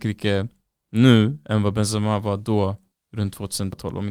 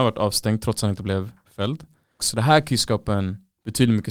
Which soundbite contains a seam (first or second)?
second